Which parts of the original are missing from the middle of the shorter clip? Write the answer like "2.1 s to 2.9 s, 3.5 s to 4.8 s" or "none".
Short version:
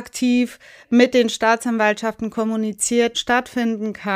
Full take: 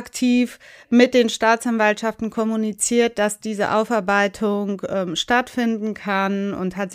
3.1 s to 5.1 s